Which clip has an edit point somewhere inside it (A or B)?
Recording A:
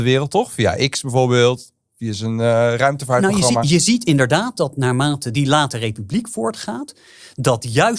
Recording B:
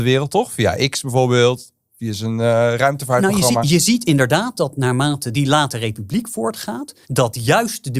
B